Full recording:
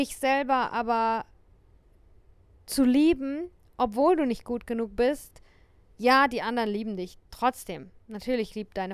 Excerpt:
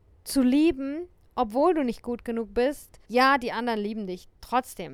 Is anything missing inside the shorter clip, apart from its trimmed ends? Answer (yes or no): yes